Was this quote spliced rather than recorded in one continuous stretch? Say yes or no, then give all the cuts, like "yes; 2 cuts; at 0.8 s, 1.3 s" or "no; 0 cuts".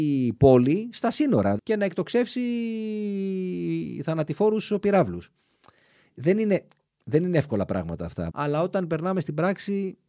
yes; 2 cuts; at 1.6 s, 8.3 s